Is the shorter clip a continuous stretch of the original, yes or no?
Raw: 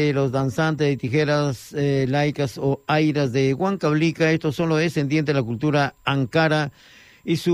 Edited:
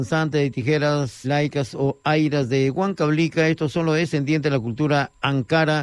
no